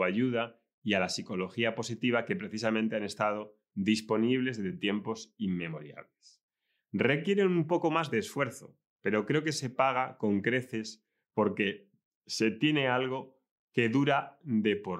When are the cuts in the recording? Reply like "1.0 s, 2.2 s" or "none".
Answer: none